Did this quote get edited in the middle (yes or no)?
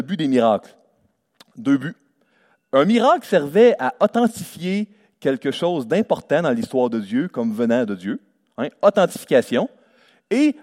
no